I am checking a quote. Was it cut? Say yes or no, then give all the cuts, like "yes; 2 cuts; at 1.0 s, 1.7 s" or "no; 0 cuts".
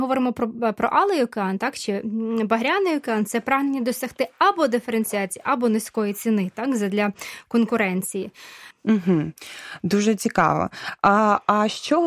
yes; 1 cut; at 8.7 s